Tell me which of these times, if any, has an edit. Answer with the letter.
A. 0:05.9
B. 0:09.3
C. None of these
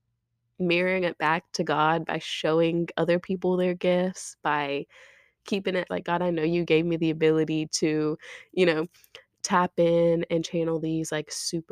A